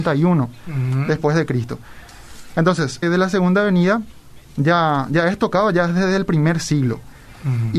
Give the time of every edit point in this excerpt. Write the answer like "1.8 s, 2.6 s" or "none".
3.0 s

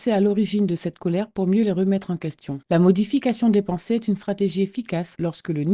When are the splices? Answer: none

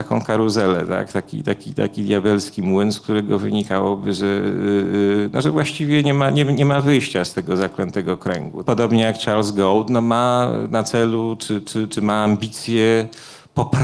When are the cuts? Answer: 8.7 s

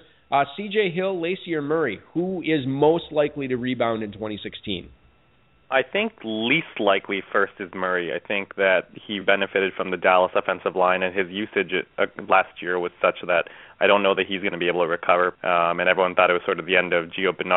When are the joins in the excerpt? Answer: 9.2 s, 15.3 s

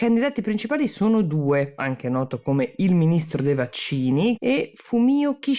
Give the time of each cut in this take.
1.8 s, 4.4 s

